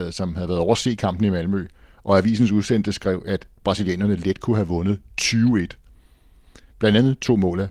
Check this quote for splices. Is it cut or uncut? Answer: cut